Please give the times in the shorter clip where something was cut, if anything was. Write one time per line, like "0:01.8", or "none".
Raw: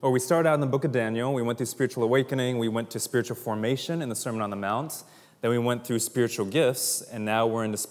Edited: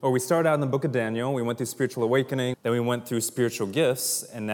0:02.5